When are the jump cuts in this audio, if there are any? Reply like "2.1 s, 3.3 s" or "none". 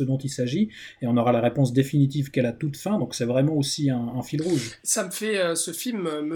none

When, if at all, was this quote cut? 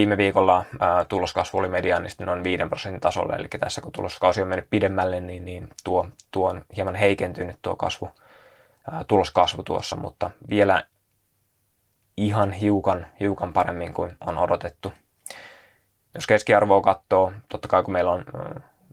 none

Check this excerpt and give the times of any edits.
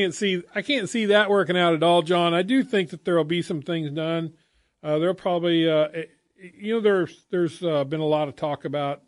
none

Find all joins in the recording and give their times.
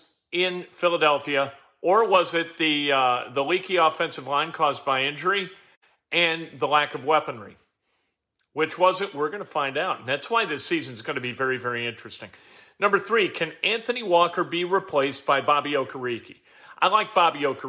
none

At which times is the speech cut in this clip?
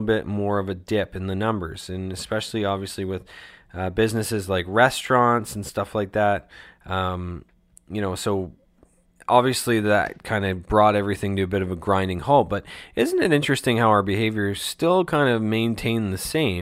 none

